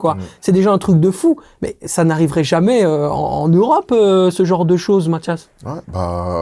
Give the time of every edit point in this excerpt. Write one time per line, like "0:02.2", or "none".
none